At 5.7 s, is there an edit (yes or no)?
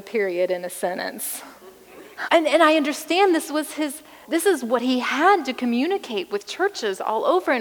no